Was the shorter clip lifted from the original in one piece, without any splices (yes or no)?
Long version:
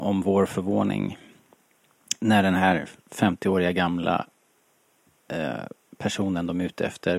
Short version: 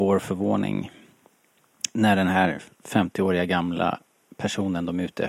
no